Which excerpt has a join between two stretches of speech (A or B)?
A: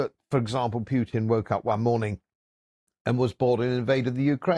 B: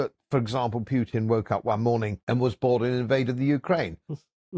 B